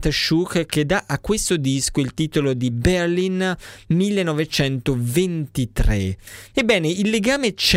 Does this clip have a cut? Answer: yes; 1 cut; at 6.5 s

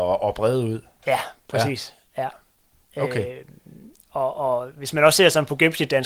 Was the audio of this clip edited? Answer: no; 0 cuts

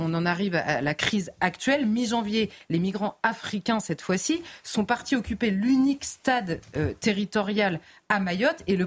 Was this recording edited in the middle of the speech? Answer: no; 0 cuts

